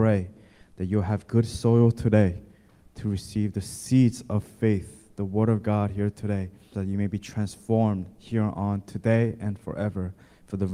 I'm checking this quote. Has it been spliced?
yes; 1 cut; at 6.7 s

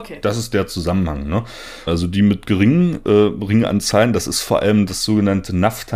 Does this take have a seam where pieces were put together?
yes; 1 cut; at 1.9 s

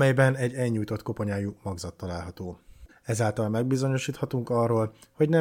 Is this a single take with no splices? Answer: no; 1 cut; at 2.9 s

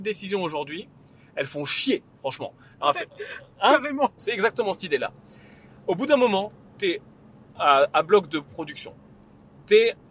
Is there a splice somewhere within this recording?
yes; 1 cut; at 4.2 s

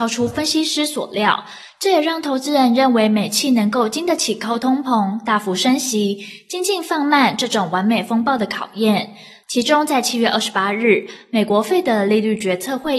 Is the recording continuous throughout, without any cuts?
yes; 0 cuts

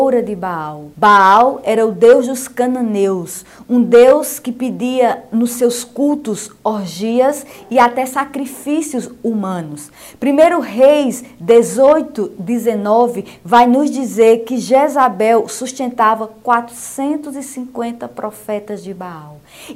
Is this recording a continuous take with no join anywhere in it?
no; 1 cut; at 0.9 s

